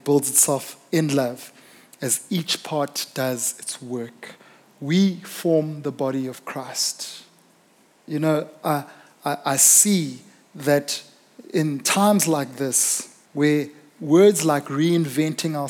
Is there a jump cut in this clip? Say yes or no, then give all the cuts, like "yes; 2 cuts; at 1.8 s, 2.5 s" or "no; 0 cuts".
yes; 2 cuts; at 8.0 s, 13.2 s